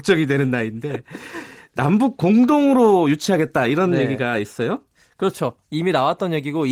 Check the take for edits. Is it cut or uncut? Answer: uncut